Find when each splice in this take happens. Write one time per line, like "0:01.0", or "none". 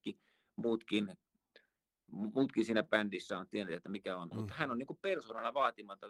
0:04.3

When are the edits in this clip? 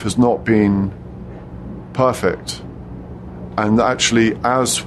none

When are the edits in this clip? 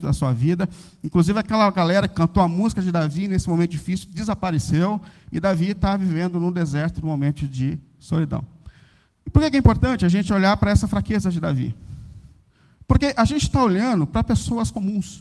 none

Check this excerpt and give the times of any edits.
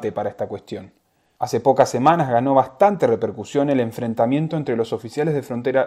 0:01.4

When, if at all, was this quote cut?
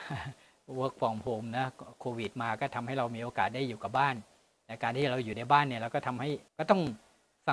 0:06.5

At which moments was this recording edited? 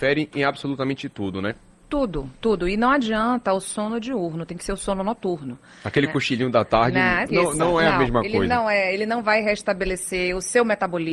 0:07.3

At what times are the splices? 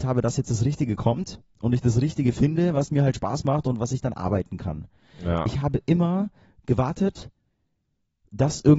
none

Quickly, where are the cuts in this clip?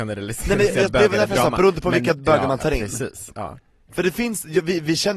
none

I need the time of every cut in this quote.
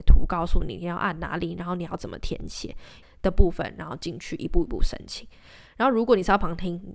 0:03.0

